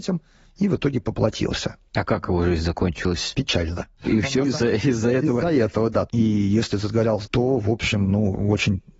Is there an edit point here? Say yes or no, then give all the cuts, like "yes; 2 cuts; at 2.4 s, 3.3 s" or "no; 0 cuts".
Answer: yes; 2 cuts; at 6.1 s, 7.2 s